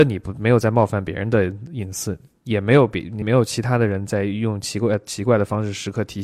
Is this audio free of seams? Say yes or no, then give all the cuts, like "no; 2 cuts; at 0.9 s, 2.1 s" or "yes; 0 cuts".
no; 1 cut; at 3.2 s